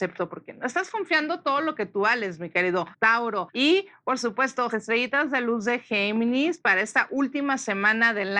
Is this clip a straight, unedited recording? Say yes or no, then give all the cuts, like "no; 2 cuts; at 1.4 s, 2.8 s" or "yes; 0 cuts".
no; 2 cuts; at 3.5 s, 4.7 s